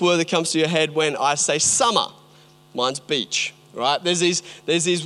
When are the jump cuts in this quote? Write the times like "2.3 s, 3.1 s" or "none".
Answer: none